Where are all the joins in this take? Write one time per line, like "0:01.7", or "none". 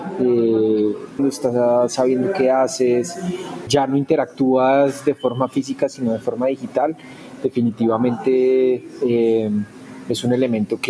0:01.2
0:03.7

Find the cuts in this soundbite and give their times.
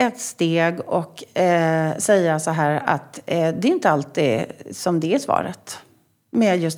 none

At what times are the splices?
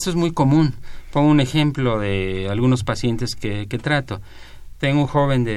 none

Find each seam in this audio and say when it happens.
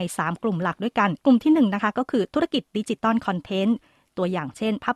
0:01.2

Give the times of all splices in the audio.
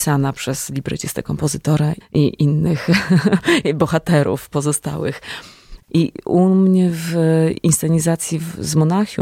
0:02.0
0:05.9

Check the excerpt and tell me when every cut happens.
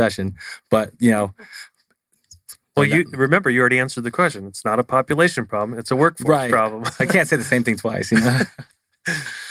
none

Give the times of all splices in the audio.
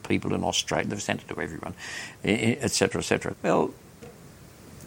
0:03.3

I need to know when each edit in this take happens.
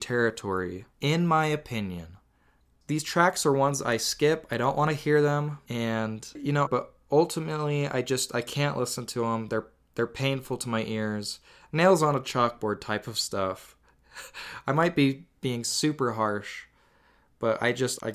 0:06.7

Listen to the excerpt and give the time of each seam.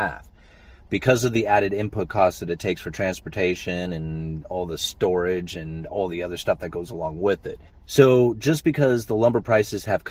0:07.7

